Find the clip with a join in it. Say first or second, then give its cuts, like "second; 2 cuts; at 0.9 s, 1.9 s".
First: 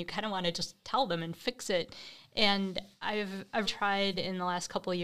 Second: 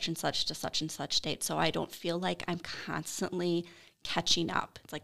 first; 1 cut; at 3.6 s